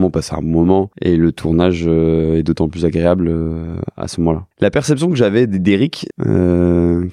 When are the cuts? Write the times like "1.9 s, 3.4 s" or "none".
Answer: 0.9 s, 4.5 s, 6.1 s